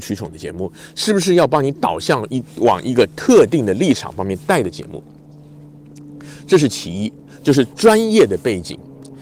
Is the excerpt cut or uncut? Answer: uncut